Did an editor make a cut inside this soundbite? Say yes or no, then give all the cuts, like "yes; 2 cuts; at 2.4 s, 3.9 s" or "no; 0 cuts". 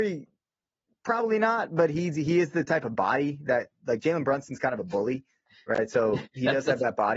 no; 0 cuts